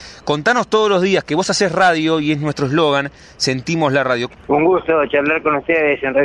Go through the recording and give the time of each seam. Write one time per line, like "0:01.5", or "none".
0:04.3